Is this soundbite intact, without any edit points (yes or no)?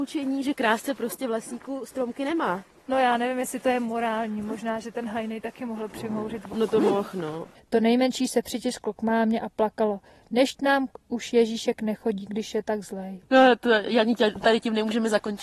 no